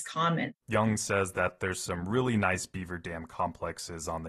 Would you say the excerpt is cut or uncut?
uncut